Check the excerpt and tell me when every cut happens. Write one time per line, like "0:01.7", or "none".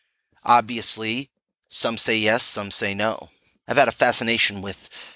0:03.7